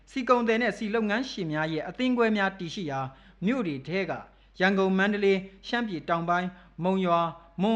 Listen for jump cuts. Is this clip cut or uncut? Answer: uncut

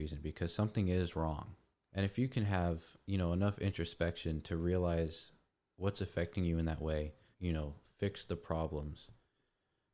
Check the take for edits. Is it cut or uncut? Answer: cut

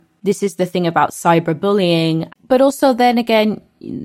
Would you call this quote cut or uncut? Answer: cut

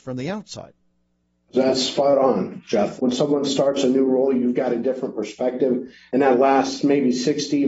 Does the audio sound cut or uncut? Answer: cut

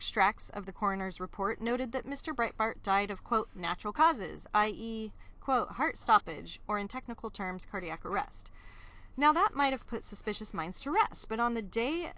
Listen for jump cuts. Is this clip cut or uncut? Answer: uncut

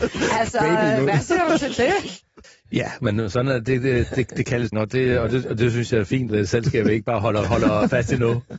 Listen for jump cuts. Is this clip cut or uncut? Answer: cut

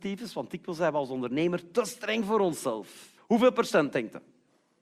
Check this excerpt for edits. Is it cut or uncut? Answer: cut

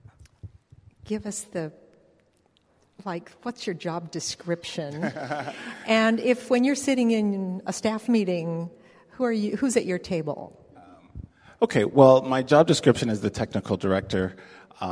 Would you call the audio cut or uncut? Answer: uncut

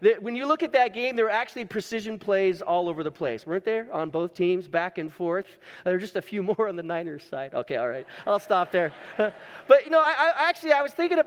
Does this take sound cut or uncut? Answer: uncut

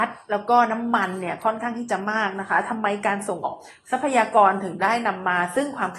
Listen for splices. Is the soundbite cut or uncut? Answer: cut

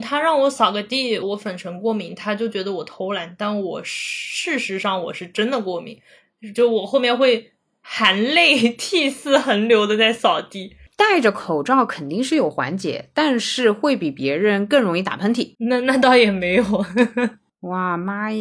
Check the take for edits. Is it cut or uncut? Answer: cut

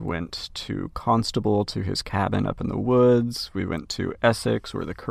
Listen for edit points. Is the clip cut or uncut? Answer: uncut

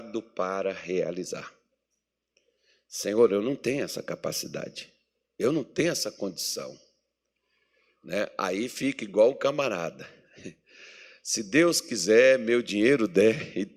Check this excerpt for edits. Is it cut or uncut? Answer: uncut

